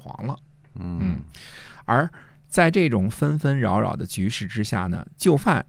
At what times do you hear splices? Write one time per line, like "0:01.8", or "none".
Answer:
none